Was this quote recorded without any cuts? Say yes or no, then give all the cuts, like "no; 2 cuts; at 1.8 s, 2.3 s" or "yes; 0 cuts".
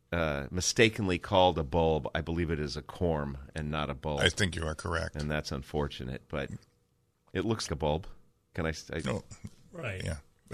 no; 1 cut; at 7.7 s